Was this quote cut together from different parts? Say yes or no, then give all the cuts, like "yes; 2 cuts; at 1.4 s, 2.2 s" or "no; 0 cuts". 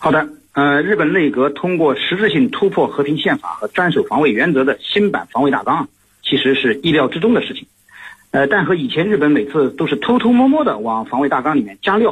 no; 0 cuts